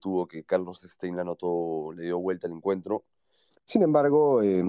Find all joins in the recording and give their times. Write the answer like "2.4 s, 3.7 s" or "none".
3.5 s